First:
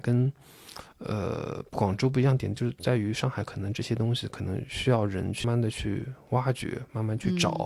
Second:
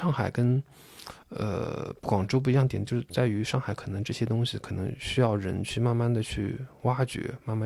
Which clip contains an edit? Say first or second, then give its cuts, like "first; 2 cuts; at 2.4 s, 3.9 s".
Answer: first; 1 cut; at 5.4 s